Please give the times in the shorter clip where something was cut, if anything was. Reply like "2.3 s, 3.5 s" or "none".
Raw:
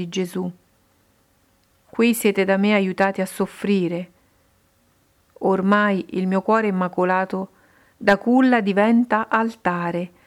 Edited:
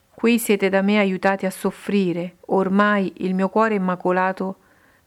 2.4 s